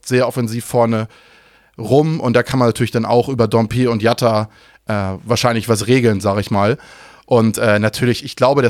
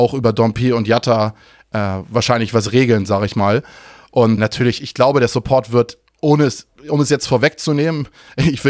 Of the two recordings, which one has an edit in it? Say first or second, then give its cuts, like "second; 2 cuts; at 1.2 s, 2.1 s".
second; 1 cut; at 4.4 s